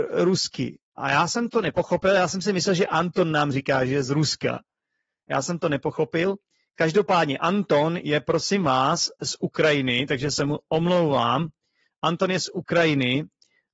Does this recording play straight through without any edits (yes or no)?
yes